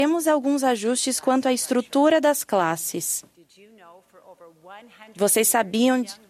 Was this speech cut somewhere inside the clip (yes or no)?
no